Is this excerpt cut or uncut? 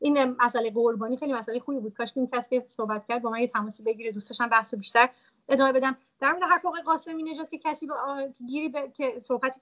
uncut